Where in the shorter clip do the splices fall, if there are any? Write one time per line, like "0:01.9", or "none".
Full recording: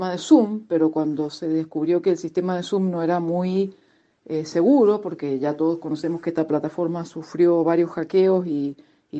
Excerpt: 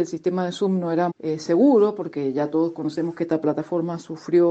0:01.1